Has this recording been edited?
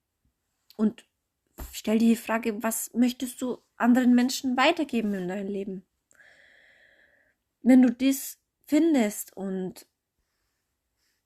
no; 0 cuts

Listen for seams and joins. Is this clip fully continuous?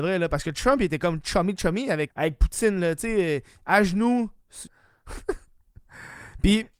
no; 2 cuts; at 2.1 s, 4.7 s

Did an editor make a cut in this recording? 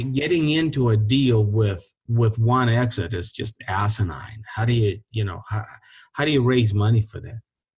no; 0 cuts

